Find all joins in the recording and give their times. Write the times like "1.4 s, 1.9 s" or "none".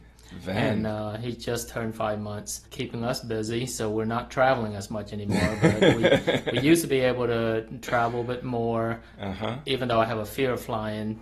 2.7 s